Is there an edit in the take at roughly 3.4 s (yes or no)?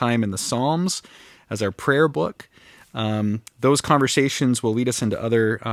no